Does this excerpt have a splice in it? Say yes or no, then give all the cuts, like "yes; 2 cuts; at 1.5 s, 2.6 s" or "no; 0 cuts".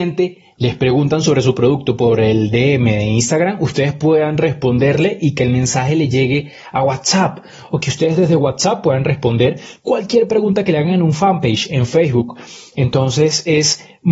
no; 0 cuts